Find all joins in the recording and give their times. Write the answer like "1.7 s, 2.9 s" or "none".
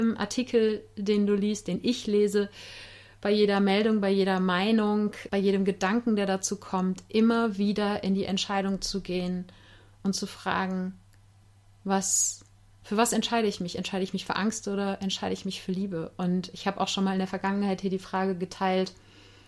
5.3 s